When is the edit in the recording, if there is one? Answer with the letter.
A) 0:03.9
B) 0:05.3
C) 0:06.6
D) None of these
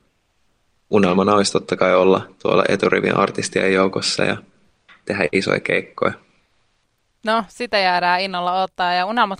D